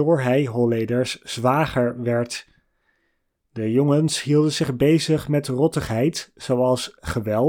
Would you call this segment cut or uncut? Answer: uncut